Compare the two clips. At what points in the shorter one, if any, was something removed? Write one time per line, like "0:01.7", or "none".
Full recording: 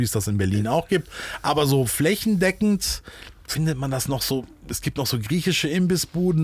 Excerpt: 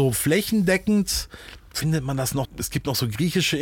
0:02.4